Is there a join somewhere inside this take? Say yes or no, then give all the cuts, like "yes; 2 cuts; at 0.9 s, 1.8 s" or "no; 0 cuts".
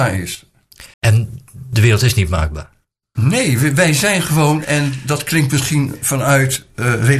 yes; 1 cut; at 0.9 s